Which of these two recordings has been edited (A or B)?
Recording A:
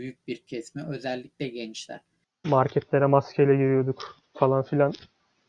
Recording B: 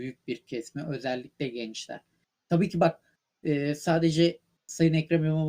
A